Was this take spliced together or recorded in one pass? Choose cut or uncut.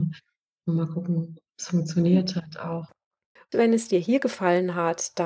cut